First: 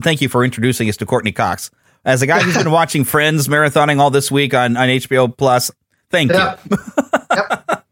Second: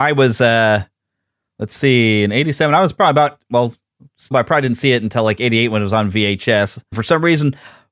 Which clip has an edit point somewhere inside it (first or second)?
second